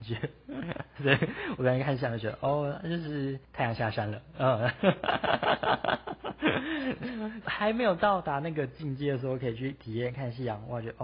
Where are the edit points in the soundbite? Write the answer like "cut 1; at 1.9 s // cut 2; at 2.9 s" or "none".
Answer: cut 1; at 1.0 s